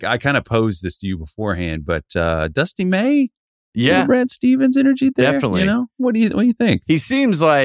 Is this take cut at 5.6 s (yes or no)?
no